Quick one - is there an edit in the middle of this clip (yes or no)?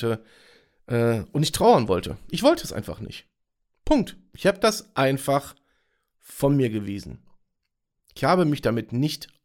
no